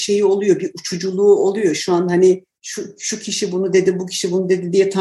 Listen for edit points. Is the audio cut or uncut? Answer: uncut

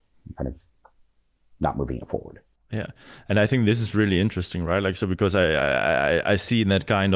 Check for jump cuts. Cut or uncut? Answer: uncut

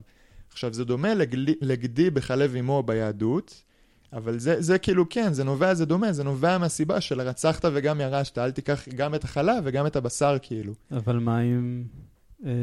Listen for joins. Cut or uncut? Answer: uncut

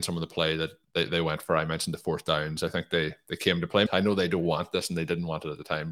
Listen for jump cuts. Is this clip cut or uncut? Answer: cut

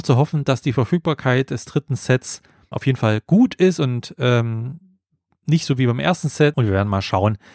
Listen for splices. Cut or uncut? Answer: cut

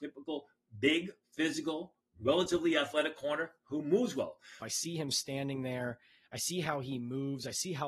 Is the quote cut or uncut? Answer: cut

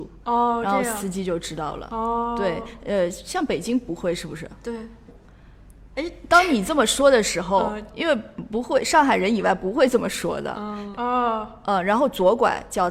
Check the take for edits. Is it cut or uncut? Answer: cut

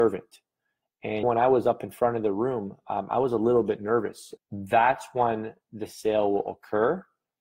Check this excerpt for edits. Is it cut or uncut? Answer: cut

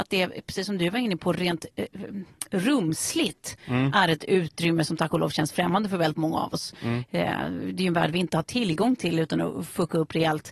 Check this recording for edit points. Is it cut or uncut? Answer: uncut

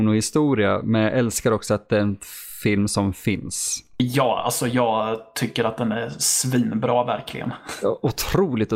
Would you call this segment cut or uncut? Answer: uncut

